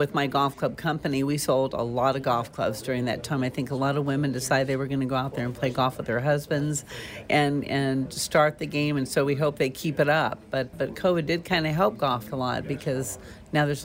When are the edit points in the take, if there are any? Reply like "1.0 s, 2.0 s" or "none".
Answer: 10.7 s, 12.3 s